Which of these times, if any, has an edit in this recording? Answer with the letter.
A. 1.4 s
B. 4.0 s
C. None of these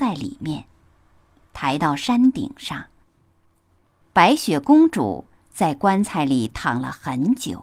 B